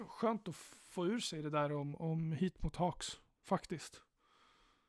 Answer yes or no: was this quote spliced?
no